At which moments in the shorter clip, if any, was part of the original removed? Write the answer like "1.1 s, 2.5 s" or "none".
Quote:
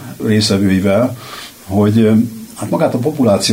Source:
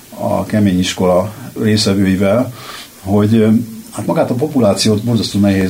none